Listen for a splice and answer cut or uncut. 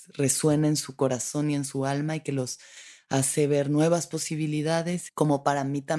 cut